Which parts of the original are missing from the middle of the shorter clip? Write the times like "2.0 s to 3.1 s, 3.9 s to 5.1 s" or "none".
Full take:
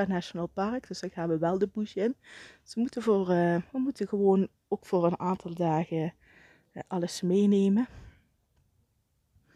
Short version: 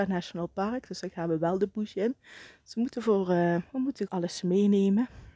4.1 s to 6.9 s